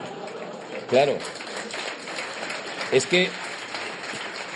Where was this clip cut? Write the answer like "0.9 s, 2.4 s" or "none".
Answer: none